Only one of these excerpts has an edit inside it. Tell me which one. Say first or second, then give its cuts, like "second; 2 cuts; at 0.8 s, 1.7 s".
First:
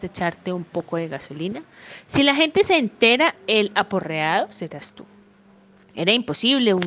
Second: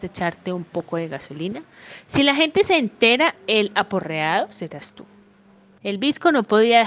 second; 1 cut; at 5.8 s